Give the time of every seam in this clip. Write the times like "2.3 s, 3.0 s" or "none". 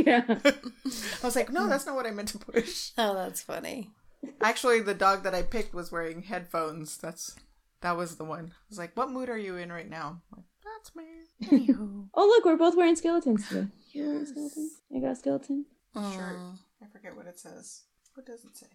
none